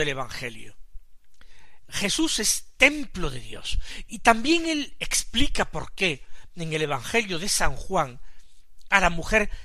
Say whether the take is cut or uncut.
cut